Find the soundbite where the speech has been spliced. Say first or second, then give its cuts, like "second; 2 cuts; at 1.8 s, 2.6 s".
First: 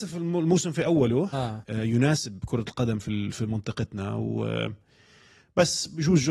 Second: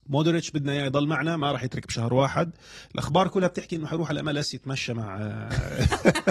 first; 1 cut; at 1.6 s